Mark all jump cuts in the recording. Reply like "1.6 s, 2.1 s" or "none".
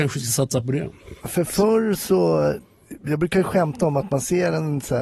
none